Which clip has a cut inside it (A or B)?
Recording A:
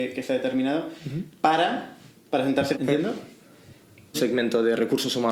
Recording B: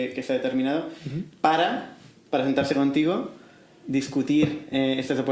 A